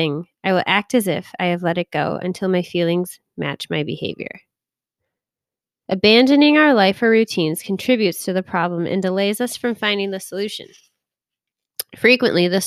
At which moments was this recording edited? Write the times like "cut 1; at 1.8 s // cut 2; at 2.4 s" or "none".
cut 1; at 5.8 s